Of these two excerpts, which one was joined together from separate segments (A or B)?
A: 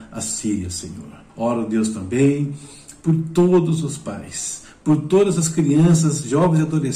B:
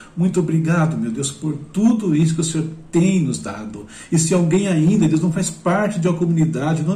A